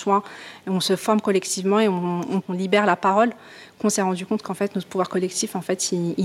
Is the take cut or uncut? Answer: uncut